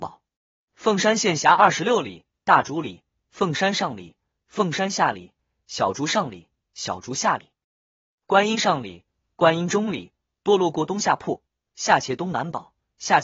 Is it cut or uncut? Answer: cut